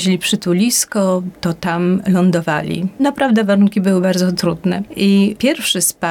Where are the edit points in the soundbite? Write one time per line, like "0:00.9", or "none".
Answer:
none

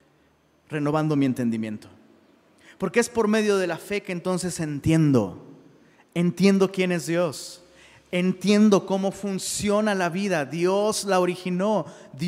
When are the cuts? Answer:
none

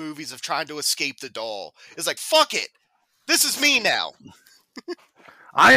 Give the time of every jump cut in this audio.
none

